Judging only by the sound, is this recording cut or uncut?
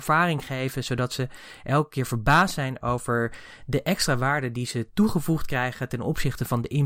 uncut